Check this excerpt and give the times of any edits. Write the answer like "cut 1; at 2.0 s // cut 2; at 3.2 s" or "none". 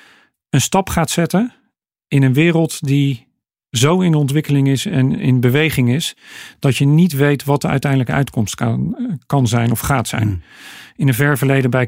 none

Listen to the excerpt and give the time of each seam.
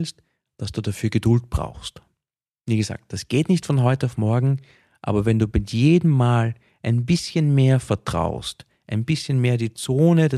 none

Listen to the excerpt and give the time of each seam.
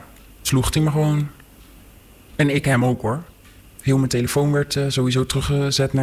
cut 1; at 3.6 s

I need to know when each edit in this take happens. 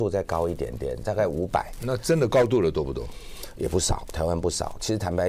none

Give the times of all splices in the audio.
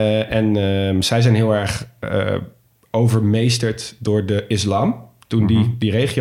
none

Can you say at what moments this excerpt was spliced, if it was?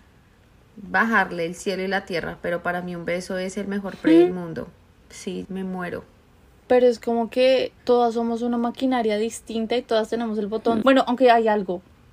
cut 1; at 5.4 s // cut 2; at 7.8 s // cut 3; at 10.8 s

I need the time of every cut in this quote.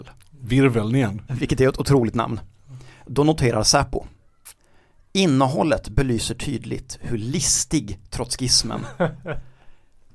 cut 1; at 1.3 s

